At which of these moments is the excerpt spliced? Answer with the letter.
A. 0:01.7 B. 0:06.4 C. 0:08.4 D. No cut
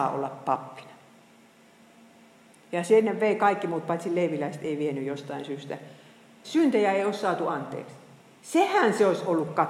B